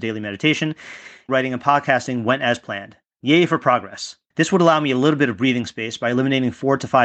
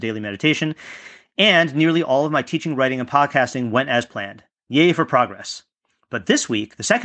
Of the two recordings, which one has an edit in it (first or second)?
first